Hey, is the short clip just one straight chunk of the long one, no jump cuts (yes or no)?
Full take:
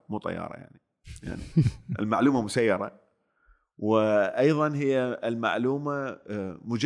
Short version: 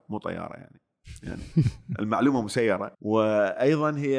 no